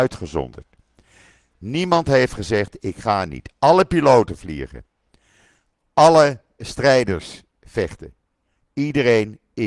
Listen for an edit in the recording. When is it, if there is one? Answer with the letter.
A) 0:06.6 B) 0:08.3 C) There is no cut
A